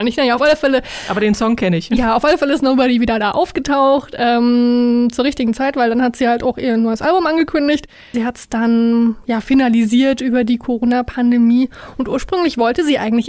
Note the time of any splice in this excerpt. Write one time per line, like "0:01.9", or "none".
0:08.1